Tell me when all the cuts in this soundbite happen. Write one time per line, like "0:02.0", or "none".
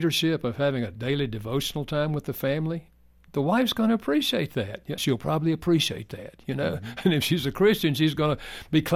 0:05.0